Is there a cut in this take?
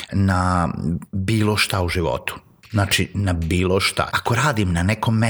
yes; 1 cut; at 4.1 s

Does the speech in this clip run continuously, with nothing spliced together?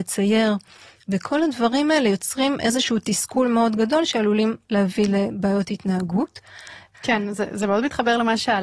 no; 1 cut; at 6.9 s

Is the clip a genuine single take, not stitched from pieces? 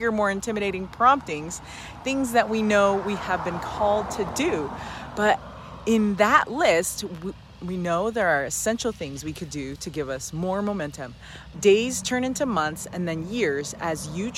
no; 2 cuts; at 7.6 s, 11.5 s

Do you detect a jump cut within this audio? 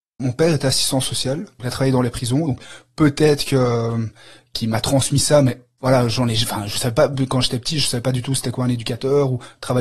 no; 0 cuts

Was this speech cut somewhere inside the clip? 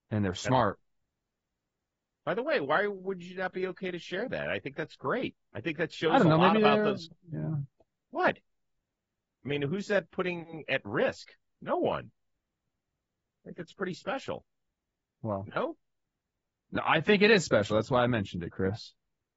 no; 0 cuts

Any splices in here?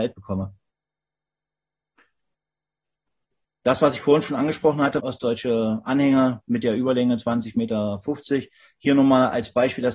yes; 1 cut; at 5.0 s

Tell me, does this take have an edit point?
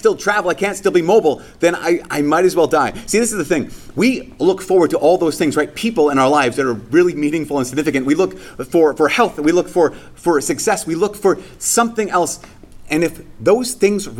no; 0 cuts

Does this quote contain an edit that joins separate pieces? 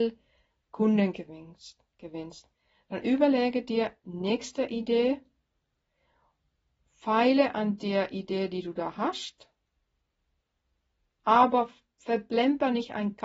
no; 0 cuts

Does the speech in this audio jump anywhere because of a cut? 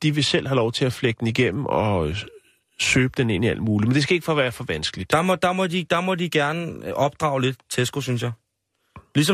no; 0 cuts

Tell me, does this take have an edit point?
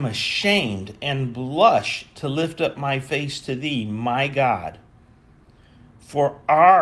no; 0 cuts

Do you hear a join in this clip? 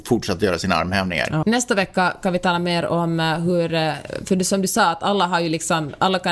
yes; 1 cut; at 1.4 s

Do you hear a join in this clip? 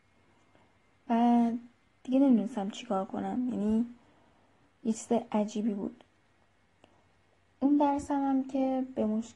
no; 0 cuts

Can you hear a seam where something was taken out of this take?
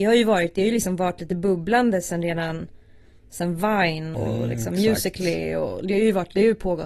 yes; 1 cut; at 4.1 s

